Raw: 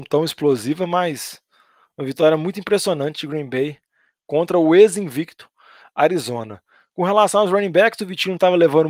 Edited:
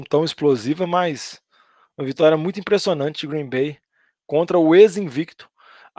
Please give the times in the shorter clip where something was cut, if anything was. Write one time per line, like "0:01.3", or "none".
none